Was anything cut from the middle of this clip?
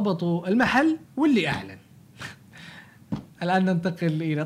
yes; 1 cut; at 1.1 s

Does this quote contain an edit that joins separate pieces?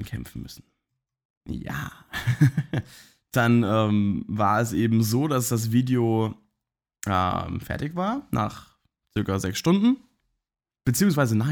no; 0 cuts

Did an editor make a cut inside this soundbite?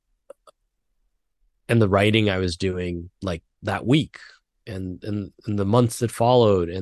yes; 1 cut; at 3.1 s

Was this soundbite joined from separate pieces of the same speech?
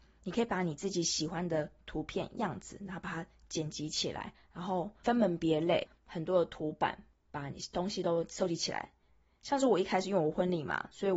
no; 0 cuts

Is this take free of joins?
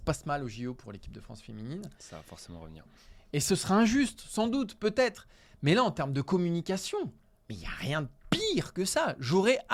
no; 1 cut; at 2.8 s

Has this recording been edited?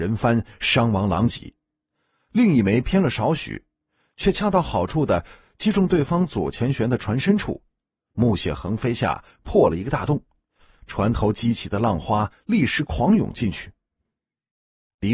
no; 0 cuts

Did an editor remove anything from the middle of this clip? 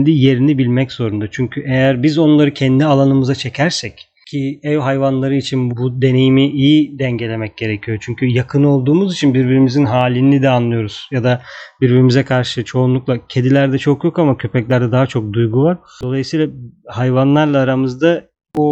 yes; 1 cut; at 5.7 s

